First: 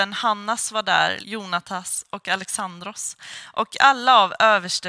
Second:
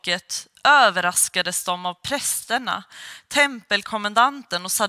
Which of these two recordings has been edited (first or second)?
first